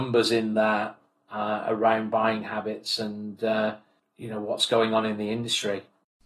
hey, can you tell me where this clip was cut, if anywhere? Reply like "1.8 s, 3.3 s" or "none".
none